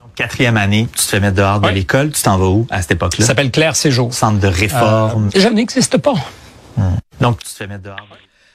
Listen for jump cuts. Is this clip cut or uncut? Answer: cut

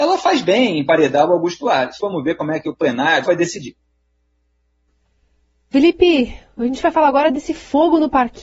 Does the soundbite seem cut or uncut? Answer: cut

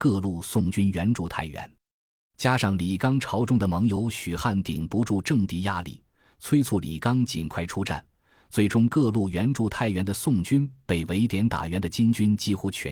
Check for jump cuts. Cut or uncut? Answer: uncut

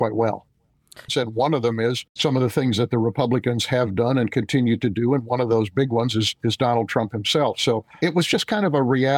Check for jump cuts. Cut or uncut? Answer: cut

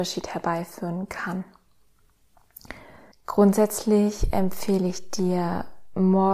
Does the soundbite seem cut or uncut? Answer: cut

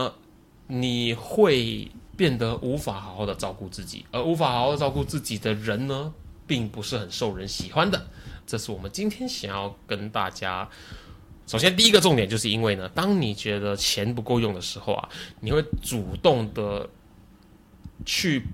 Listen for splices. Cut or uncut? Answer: cut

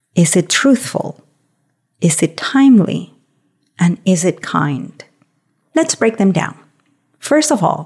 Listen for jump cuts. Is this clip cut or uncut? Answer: uncut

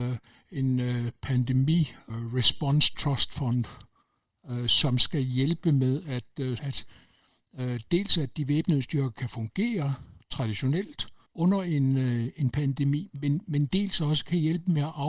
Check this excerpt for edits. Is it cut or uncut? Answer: cut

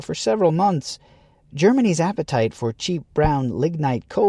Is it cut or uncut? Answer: uncut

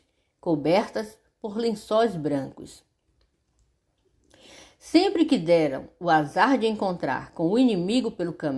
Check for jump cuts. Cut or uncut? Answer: uncut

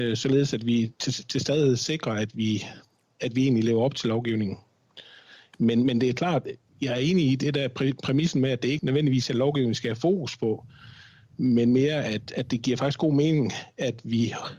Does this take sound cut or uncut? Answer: cut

